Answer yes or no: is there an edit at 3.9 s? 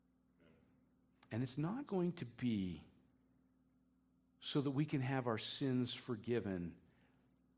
no